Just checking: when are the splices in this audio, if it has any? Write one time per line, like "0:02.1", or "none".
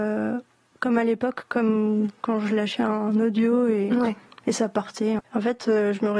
0:05.2

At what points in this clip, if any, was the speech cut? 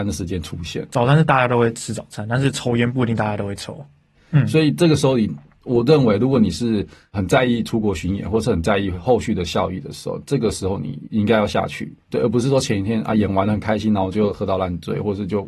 0:04.1
0:12.0

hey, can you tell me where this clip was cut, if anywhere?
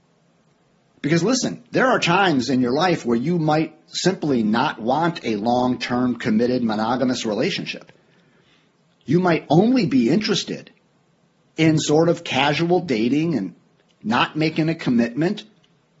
0:00.9

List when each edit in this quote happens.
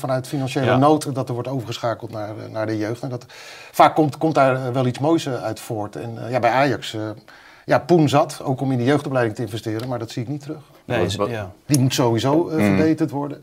0:11.7

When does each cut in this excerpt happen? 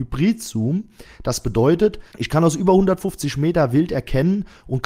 0:02.1

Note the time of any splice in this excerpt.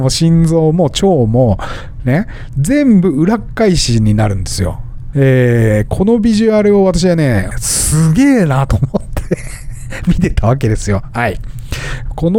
0:05.1
0:07.5

